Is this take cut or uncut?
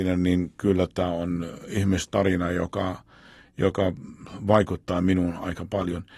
uncut